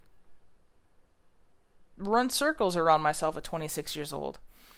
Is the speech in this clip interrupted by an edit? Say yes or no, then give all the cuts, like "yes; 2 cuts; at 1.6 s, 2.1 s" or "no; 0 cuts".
no; 0 cuts